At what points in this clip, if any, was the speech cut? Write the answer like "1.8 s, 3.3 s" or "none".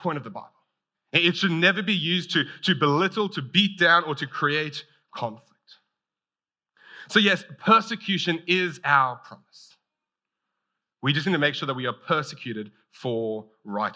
0.9 s